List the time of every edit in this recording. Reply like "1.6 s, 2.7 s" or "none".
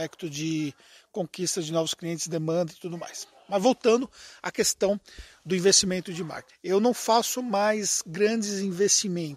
6.5 s